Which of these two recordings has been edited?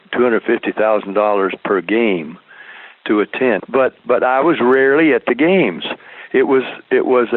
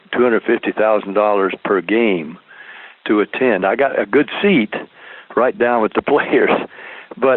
first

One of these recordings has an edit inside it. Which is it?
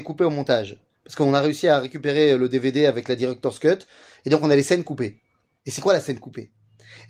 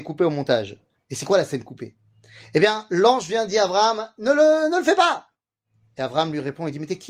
second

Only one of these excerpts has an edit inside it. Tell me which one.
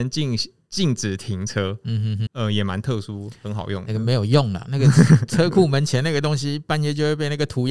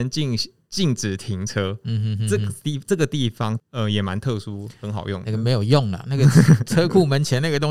first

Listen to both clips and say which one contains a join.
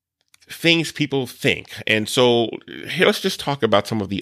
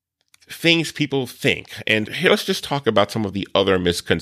second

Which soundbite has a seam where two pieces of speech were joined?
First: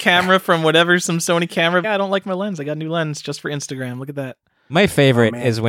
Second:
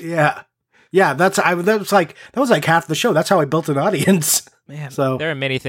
first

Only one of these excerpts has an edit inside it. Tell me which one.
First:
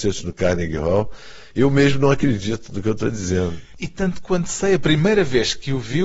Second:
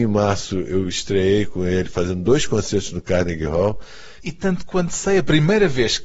second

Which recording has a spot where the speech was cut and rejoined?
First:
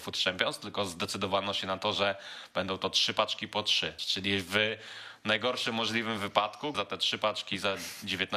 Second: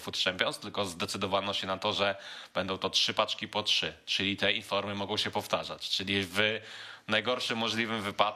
first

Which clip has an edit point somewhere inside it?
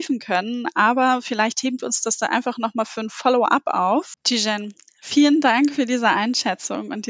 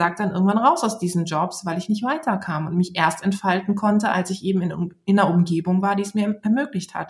first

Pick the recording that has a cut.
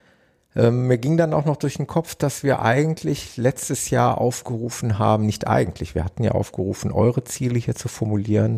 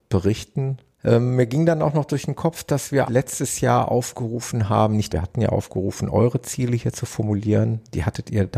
second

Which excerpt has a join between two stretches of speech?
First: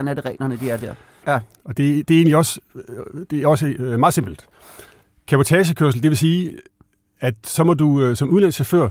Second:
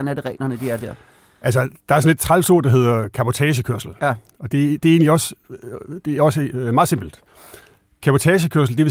first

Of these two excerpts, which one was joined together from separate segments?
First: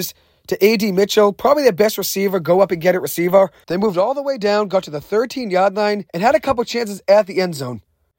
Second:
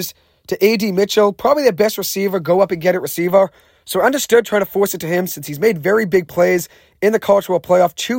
first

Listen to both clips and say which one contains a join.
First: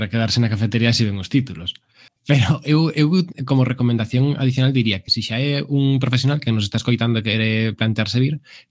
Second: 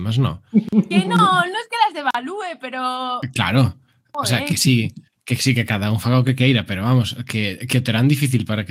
first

